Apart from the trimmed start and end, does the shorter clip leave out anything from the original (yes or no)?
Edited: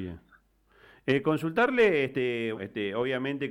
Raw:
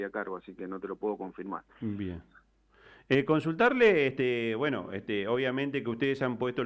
yes